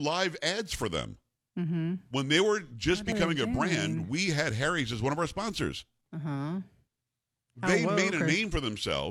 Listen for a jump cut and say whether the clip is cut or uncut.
uncut